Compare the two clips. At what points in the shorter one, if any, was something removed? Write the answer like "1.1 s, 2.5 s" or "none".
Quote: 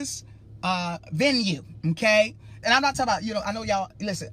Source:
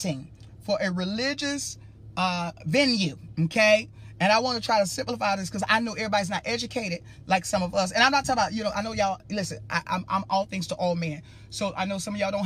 2.6 s